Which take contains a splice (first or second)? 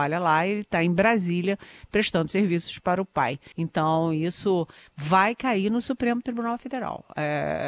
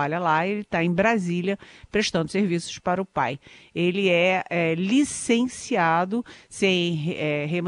first